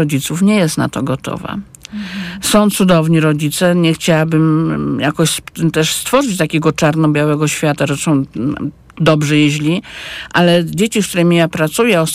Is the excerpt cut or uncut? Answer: uncut